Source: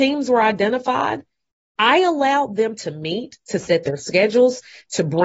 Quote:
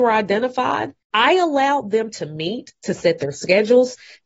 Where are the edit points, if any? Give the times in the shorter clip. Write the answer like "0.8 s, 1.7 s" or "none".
1.0 s

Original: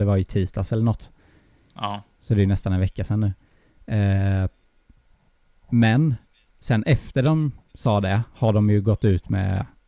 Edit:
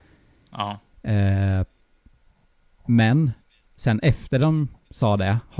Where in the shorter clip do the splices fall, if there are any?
0.9 s

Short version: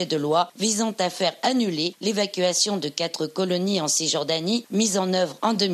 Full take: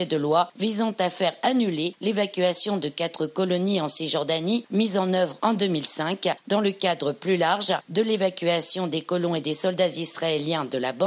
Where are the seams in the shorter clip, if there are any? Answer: none

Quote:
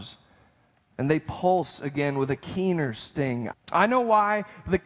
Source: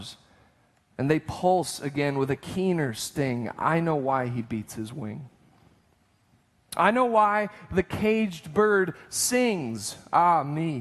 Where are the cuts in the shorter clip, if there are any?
3.5 s

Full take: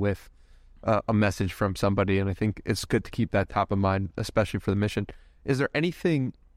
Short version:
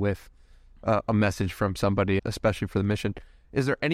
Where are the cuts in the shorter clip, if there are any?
2.2 s

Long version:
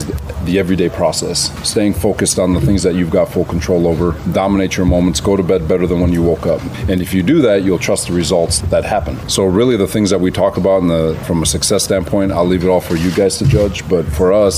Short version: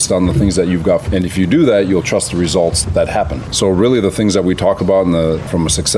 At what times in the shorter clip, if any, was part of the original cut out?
1.0 s

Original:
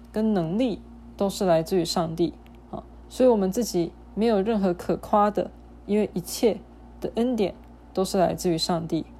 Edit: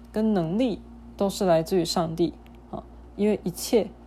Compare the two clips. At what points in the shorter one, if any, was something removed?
3.1 s

